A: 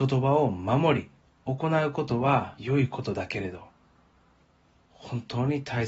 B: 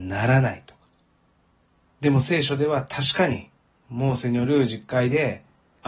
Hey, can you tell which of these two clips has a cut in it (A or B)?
B